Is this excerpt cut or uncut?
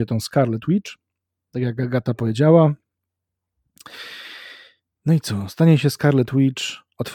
uncut